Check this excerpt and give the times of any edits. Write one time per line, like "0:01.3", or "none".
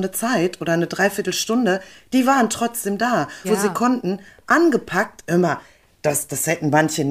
0:03.4